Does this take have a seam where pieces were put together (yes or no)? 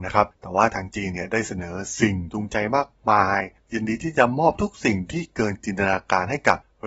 no